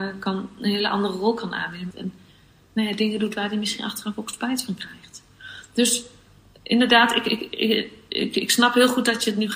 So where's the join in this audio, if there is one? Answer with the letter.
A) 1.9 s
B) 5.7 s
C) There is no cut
A